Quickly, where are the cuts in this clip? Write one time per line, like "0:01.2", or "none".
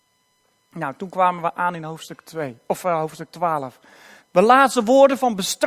0:04.2